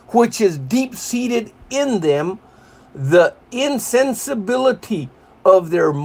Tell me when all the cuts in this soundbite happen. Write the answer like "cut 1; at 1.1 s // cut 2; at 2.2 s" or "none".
none